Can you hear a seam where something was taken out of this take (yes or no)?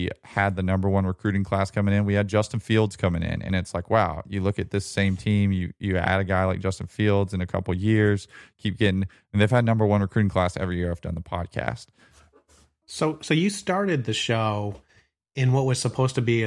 no